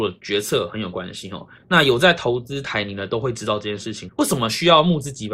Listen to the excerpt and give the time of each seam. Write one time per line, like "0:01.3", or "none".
0:01.6
0:04.1